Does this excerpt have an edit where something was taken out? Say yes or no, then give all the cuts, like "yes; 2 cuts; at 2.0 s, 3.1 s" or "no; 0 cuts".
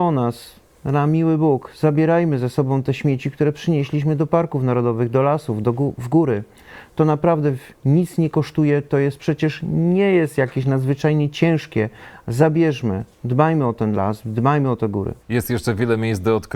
yes; 1 cut; at 15.2 s